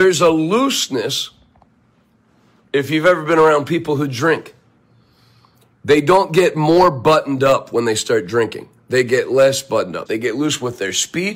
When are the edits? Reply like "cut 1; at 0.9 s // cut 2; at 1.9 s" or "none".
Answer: cut 1; at 10.1 s